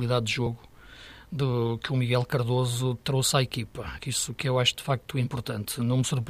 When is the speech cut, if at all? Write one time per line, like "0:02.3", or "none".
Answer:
0:04.0